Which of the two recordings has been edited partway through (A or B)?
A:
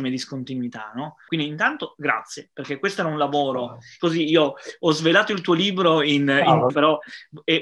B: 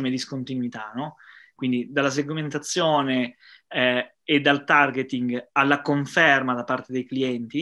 A